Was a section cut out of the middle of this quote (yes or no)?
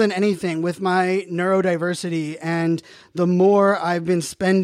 no